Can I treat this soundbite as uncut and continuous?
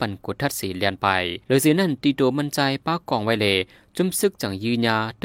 no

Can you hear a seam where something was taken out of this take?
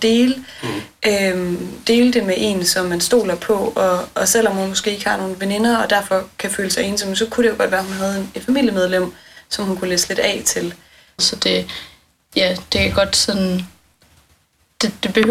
yes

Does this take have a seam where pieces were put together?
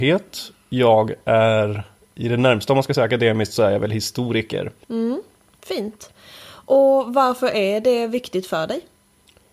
yes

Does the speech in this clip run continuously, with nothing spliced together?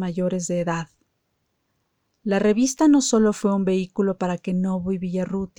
yes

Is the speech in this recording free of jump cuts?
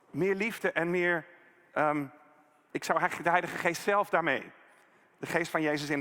no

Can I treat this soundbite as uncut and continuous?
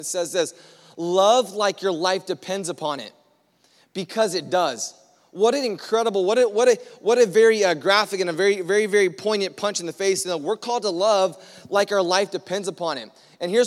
yes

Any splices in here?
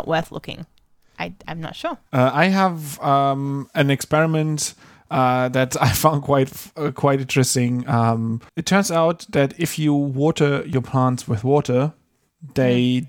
yes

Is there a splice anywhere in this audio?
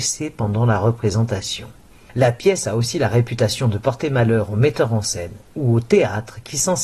no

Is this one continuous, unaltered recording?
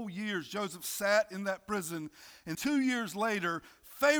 no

